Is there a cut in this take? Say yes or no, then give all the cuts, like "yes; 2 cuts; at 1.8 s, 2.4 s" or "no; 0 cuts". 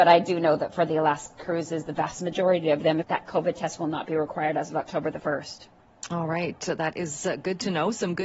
yes; 1 cut; at 3.0 s